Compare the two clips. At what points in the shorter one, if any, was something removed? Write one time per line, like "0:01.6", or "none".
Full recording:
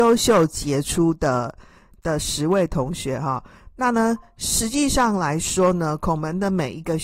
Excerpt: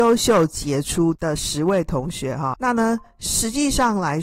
0:01.2
0:02.5